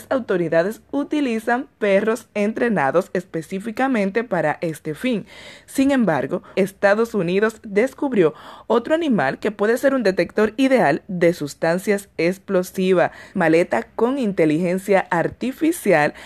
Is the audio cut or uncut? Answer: cut